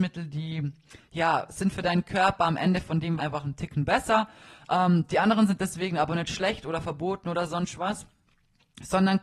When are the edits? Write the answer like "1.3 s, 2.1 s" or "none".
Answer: 3.2 s